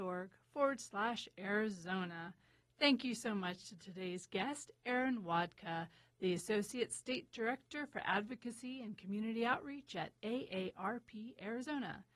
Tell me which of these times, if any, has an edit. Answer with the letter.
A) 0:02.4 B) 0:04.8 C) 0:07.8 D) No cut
D